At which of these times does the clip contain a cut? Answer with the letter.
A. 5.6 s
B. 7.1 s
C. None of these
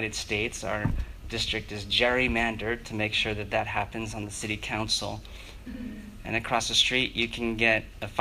A